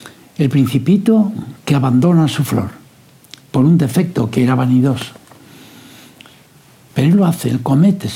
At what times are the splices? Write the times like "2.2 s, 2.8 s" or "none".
6.9 s